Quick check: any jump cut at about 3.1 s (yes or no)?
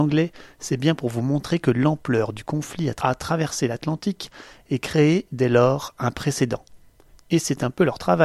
no